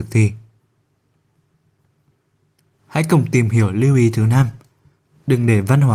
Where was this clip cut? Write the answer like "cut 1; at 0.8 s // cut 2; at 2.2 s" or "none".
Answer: none